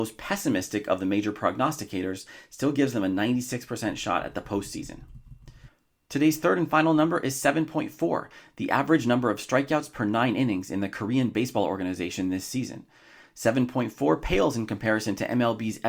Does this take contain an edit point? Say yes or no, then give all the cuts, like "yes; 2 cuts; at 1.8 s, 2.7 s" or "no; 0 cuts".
no; 0 cuts